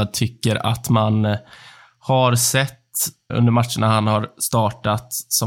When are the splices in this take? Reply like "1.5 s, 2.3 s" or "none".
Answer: 3.3 s